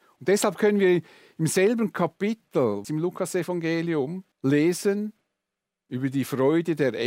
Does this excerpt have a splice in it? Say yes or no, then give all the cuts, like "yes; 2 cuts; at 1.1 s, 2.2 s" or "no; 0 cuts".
yes; 2 cuts; at 2.8 s, 4.3 s